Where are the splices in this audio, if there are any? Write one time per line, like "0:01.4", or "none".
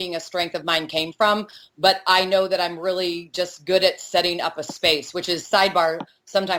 0:01.7